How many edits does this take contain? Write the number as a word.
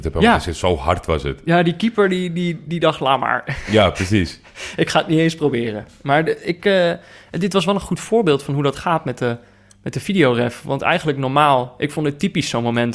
zero